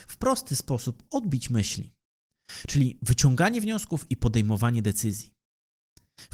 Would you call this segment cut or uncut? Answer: uncut